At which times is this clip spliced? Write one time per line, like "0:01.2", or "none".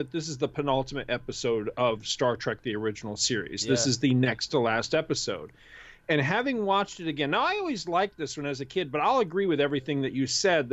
none